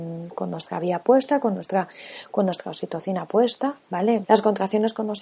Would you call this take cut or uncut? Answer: cut